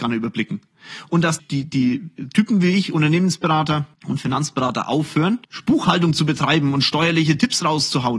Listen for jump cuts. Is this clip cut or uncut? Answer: cut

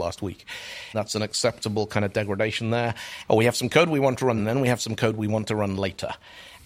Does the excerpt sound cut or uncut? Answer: cut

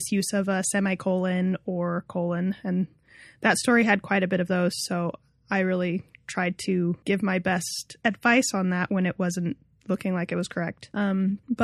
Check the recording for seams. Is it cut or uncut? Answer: uncut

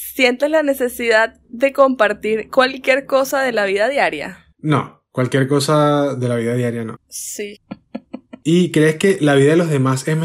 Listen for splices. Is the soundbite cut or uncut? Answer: cut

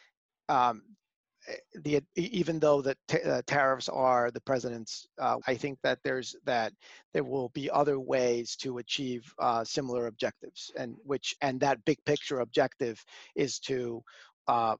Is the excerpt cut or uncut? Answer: cut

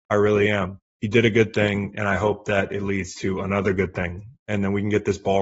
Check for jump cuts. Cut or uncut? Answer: uncut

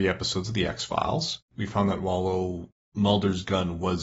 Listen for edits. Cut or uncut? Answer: cut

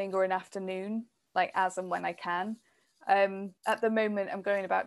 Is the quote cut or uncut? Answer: cut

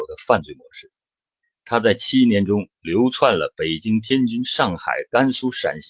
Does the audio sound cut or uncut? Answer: uncut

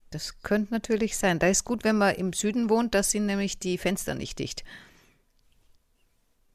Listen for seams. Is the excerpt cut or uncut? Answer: uncut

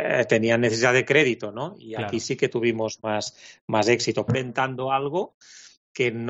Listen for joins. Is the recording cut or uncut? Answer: cut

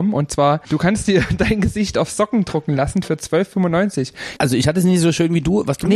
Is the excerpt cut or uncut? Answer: cut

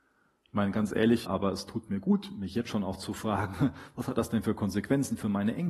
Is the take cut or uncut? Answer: cut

